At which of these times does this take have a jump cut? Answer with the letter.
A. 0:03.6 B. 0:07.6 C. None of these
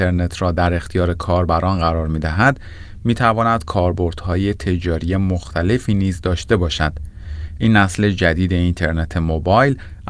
B